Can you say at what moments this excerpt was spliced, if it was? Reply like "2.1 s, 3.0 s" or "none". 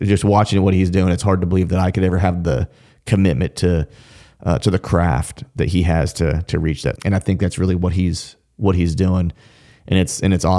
7.0 s